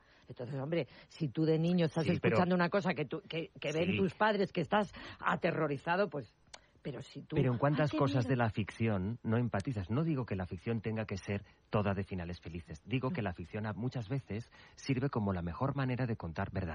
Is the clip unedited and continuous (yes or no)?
yes